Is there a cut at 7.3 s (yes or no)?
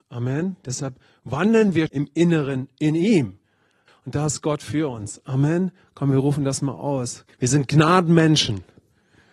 yes